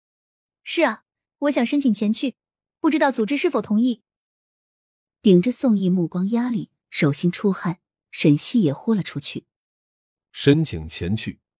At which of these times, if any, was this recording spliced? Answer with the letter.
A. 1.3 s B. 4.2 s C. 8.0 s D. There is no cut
A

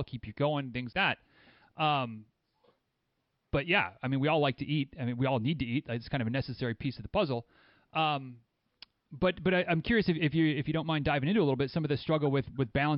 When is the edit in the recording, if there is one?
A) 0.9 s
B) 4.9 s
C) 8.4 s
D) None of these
A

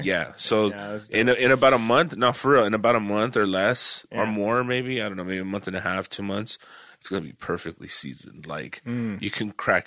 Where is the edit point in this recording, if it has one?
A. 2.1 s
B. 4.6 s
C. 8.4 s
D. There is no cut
D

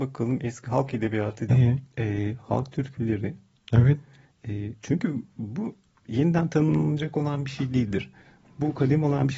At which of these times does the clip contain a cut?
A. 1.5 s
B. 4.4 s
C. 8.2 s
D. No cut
A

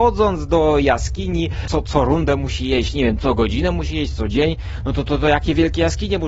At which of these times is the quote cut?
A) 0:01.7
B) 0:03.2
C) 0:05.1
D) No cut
A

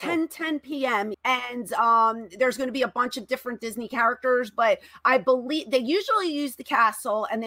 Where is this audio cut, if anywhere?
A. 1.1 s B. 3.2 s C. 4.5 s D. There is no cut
A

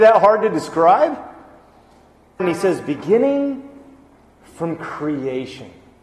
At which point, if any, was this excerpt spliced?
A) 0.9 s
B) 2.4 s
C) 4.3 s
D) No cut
B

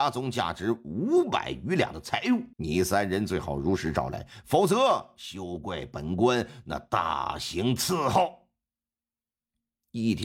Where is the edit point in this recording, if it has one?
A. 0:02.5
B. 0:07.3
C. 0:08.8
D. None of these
A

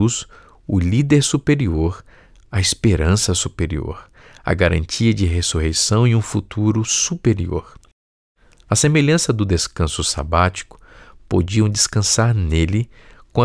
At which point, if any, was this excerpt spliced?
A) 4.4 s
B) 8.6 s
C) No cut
A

